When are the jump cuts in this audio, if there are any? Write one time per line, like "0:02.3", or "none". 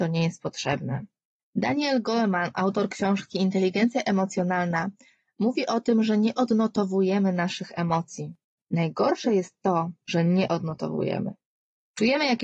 0:01.4
0:08.6
0:10.0